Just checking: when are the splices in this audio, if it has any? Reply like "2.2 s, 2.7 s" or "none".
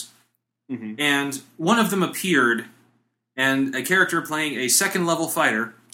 none